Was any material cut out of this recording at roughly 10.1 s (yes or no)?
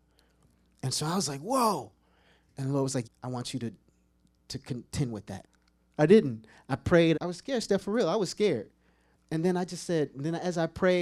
no